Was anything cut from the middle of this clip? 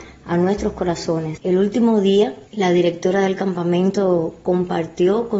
yes; 2 cuts; at 1.4 s, 2.5 s

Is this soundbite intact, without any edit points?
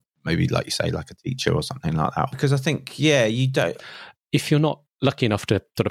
no; 2 cuts; at 2.3 s, 3.8 s

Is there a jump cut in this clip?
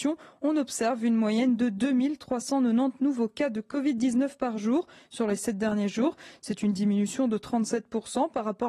no; 0 cuts

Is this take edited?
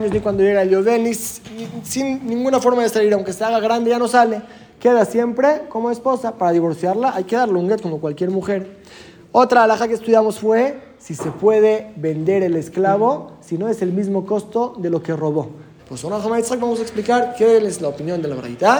yes; 1 cut; at 15.8 s

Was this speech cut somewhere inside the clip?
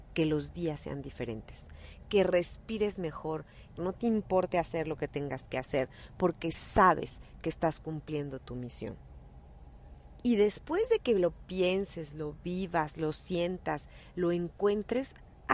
yes; 1 cut; at 3.8 s

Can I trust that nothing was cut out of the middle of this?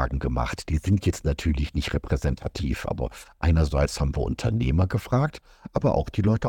yes; 0 cuts

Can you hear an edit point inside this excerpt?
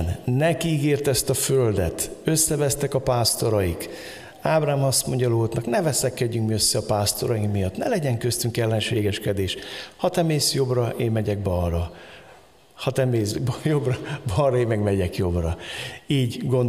no; 0 cuts

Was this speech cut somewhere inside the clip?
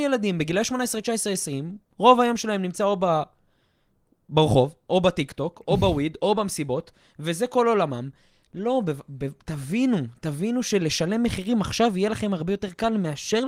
no; 0 cuts

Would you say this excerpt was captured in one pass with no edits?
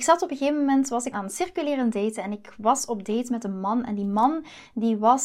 no; 1 cut; at 1.1 s

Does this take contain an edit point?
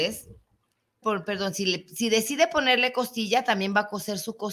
yes; 1 cut; at 1.0 s

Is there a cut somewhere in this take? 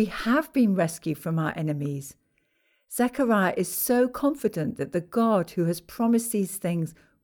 no; 0 cuts

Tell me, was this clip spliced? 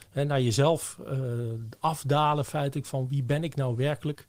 no; 0 cuts

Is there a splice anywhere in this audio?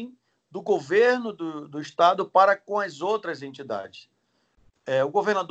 no; 0 cuts

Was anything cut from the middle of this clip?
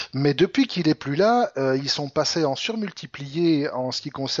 no; 0 cuts

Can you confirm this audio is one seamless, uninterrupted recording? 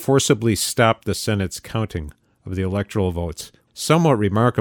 no; 1 cut; at 3.7 s

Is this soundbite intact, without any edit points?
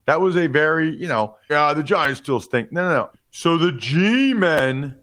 no; 2 cuts; at 1.5 s, 3.1 s

